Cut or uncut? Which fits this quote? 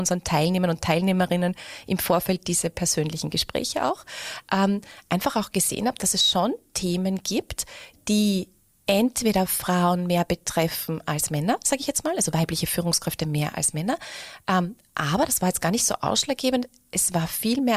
uncut